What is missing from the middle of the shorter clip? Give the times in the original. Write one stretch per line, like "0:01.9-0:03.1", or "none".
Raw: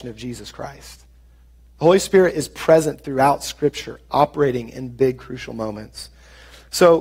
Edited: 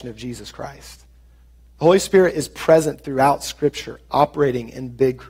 none